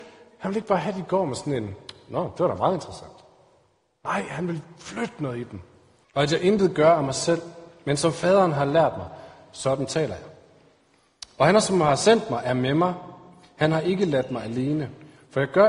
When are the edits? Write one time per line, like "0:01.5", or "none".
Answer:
0:06.0